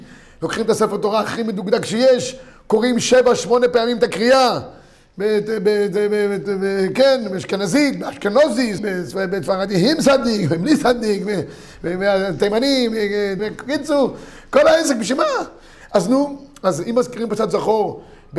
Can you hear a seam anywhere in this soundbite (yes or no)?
yes